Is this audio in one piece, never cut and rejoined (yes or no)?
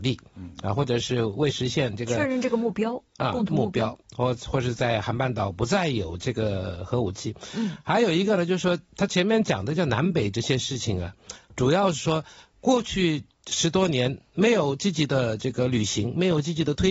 yes